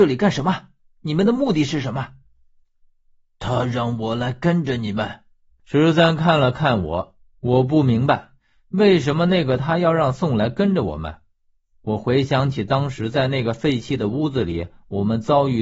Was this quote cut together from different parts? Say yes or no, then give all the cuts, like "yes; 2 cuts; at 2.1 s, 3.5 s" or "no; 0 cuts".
yes; 1 cut; at 5.6 s